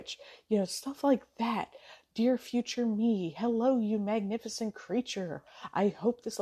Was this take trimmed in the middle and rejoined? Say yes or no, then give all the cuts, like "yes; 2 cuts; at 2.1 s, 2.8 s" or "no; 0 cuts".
no; 0 cuts